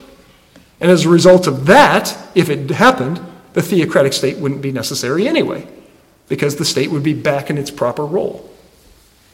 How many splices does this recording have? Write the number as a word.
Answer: zero